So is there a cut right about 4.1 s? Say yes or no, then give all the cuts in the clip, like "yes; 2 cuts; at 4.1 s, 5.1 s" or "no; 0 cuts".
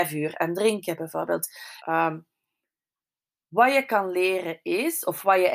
no; 1 cut; at 1.8 s